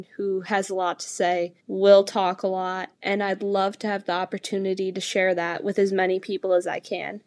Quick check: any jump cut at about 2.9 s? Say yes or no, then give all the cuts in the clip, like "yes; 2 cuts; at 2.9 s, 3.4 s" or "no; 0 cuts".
yes; 2 cuts; at 1.6 s, 2.9 s